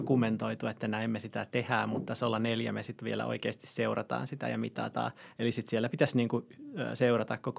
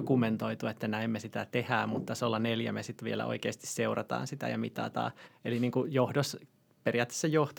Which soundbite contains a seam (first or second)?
second